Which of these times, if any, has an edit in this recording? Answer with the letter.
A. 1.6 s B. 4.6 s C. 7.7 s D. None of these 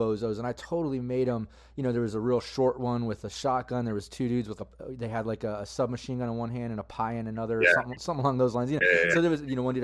B